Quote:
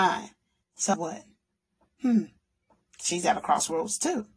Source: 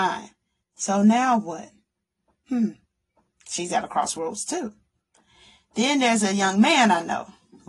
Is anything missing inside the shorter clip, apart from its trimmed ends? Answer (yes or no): yes